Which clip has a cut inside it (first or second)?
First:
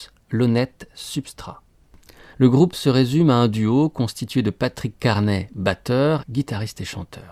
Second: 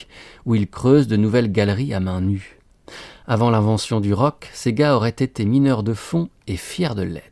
first